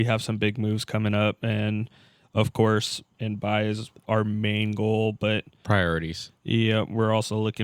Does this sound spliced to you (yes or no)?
yes